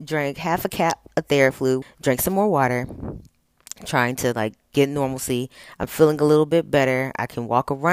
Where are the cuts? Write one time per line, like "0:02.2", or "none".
0:01.8